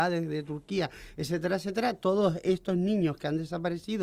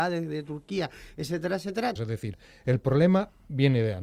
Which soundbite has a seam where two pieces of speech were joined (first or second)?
second